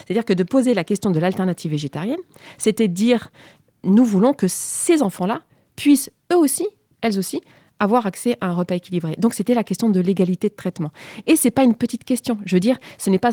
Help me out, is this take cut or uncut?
uncut